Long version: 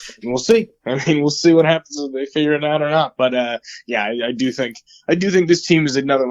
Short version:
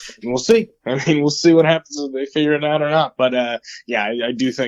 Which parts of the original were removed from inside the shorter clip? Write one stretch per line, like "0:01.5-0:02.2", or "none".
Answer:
none

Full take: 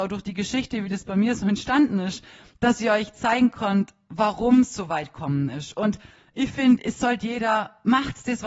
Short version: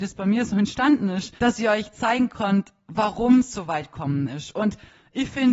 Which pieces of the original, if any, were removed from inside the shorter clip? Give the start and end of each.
0:02.3-0:02.6

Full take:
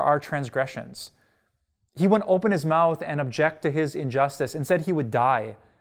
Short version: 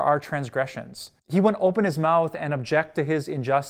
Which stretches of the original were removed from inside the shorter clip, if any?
0:01.2-0:01.9

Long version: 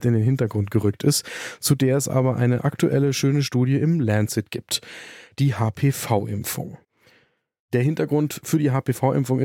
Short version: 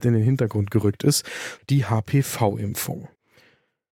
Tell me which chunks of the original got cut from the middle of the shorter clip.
0:01.6-0:05.3

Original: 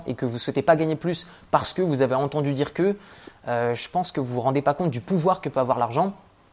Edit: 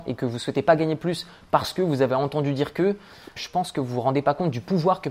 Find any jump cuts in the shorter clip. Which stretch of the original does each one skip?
0:03.4-0:03.8

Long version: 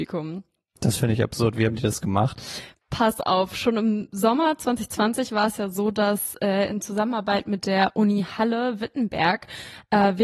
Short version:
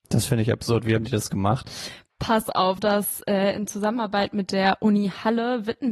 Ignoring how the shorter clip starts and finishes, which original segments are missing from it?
0:03.5-0:05.9

